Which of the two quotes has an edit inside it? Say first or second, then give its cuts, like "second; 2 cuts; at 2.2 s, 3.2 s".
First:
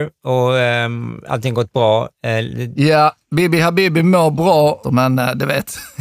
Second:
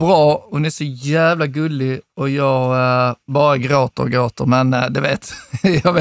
first; 2 cuts; at 2.7 s, 4.8 s